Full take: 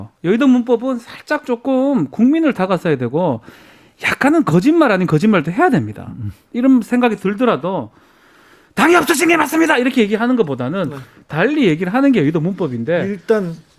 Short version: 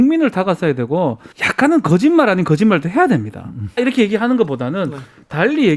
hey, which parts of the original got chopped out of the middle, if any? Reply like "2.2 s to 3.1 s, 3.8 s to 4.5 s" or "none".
3.5 s to 3.9 s, 6.4 s to 9.8 s